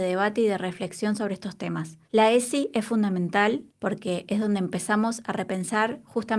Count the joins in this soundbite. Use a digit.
2